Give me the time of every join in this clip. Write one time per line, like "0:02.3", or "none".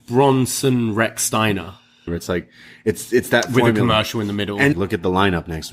0:02.1
0:04.7